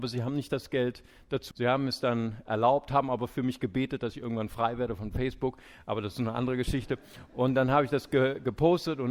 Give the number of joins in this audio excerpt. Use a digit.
1